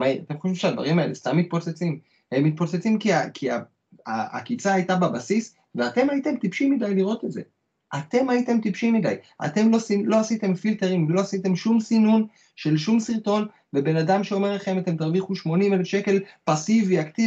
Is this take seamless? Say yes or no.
yes